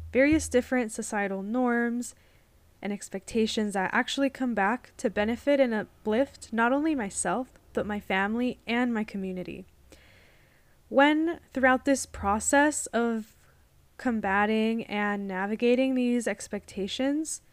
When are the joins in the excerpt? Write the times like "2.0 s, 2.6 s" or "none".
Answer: none